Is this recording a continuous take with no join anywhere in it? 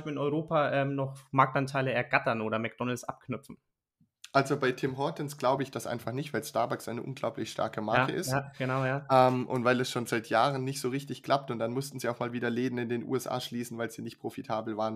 yes; 0 cuts

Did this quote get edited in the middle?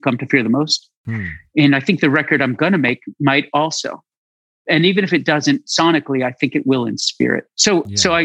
no; 0 cuts

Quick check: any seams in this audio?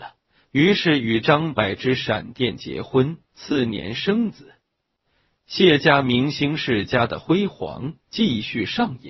no; 0 cuts

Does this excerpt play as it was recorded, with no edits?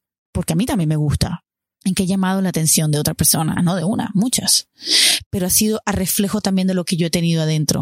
no; 2 cuts; at 1.8 s, 3.6 s

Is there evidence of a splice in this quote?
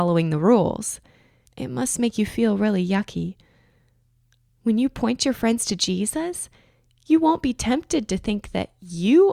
yes; 2 cuts; at 1.5 s, 4.5 s

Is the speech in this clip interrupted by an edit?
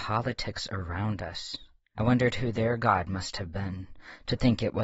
yes; 1 cut; at 1.9 s

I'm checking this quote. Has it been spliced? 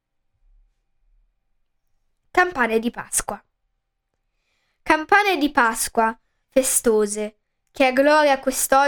no; 0 cuts

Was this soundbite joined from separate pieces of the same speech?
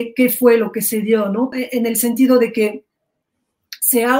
yes; 1 cut; at 1.5 s

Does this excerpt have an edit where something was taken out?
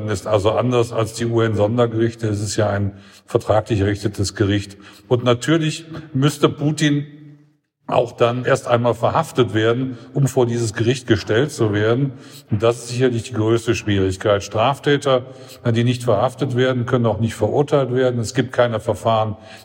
yes; 1 cut; at 8.4 s

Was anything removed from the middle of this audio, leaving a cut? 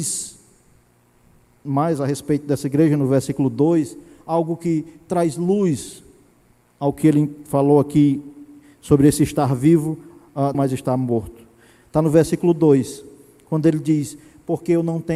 yes; 1 cut; at 10.5 s

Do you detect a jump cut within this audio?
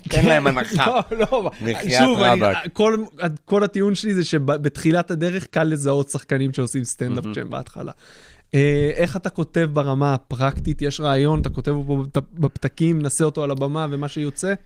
no; 0 cuts

